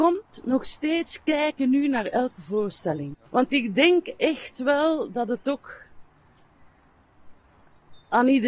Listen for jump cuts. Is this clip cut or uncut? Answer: cut